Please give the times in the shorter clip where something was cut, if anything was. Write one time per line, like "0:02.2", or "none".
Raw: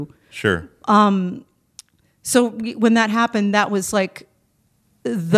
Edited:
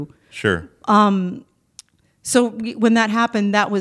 none